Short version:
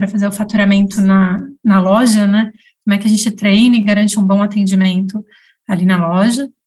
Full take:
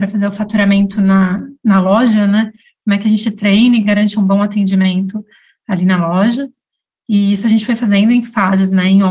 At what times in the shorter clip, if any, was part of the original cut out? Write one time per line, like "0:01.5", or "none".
none